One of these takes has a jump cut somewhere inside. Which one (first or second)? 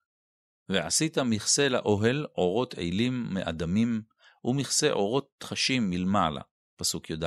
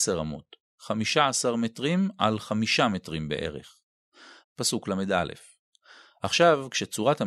second